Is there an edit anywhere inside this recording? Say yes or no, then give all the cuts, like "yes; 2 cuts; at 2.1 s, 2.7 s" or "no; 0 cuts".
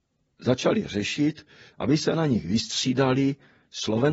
yes; 1 cut; at 1.7 s